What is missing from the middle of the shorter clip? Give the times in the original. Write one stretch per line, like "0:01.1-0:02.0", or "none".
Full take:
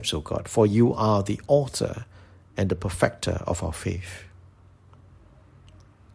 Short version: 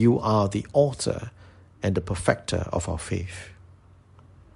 none